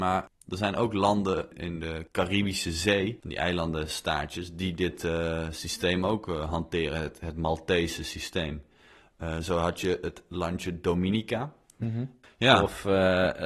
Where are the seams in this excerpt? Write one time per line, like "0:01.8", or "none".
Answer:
0:01.5
0:12.2